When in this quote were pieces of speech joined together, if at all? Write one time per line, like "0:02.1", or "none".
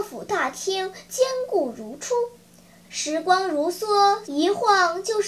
0:02.8
0:04.2